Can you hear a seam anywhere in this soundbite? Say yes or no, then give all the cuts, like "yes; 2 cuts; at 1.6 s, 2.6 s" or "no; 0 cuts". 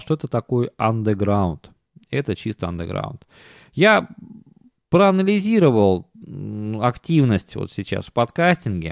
no; 0 cuts